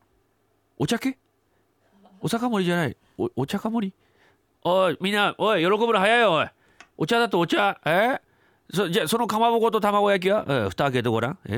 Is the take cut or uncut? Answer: uncut